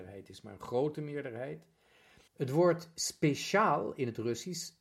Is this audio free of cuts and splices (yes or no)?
no